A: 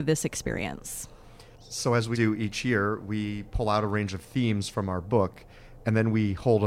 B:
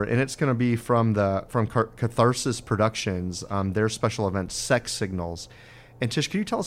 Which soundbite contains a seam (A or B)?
A